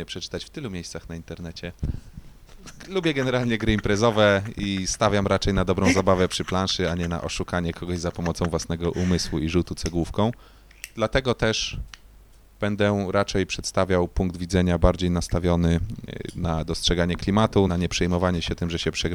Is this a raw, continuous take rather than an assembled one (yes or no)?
no